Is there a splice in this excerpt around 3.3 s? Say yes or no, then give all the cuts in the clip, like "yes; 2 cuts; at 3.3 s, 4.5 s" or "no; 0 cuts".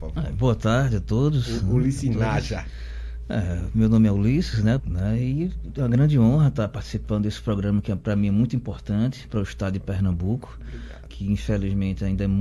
no; 2 cuts; at 4.8 s, 11.1 s